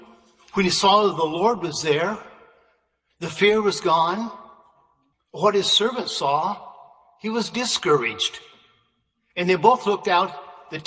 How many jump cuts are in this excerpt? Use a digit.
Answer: 1